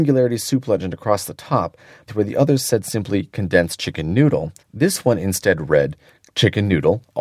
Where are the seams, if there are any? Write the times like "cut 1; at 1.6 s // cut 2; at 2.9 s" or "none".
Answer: cut 1; at 2.1 s // cut 2; at 4.6 s